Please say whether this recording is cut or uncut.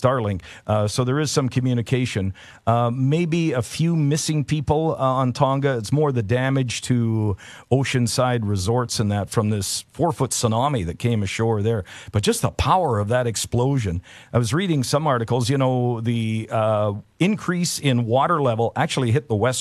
uncut